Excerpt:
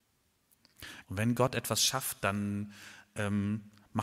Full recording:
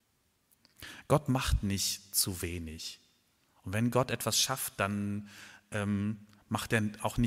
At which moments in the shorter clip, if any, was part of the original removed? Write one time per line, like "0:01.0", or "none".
0:01.0

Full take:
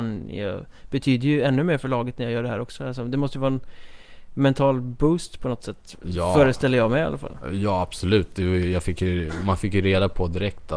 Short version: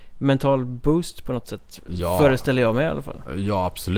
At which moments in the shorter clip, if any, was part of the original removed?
none

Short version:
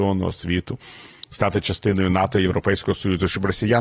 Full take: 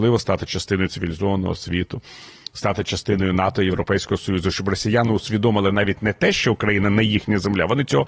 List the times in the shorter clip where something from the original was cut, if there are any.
none

